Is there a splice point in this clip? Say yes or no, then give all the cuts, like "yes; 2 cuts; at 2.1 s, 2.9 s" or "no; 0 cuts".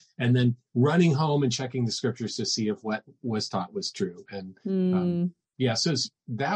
no; 0 cuts